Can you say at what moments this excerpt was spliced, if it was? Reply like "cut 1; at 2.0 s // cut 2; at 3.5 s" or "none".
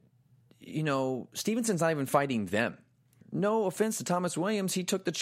cut 1; at 3.2 s